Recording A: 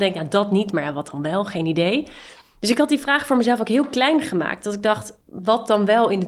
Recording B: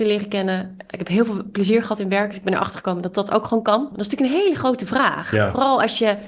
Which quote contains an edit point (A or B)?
B